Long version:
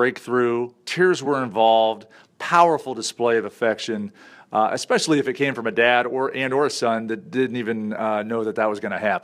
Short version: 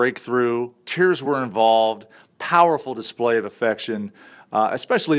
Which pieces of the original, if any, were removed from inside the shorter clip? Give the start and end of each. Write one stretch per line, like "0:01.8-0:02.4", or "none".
none